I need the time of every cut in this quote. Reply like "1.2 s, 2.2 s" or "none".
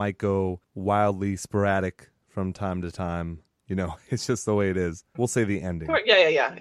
5.1 s